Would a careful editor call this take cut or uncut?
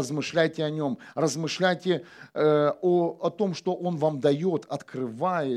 uncut